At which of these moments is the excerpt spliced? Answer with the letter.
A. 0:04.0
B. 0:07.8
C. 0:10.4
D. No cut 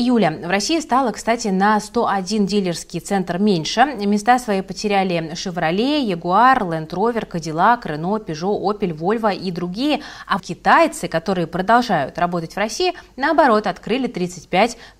C